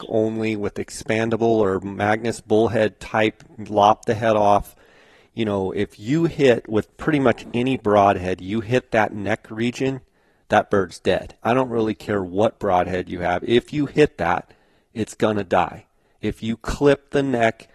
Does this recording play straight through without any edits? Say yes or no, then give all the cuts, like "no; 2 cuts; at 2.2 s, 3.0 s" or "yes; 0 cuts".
no; 1 cut; at 11.4 s